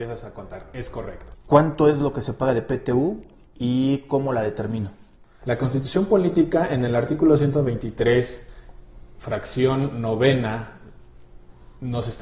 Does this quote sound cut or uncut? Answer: cut